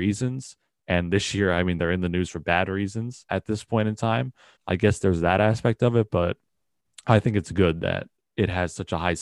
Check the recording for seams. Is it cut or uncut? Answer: cut